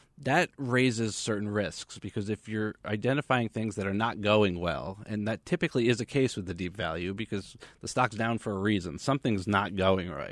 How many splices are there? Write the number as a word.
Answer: zero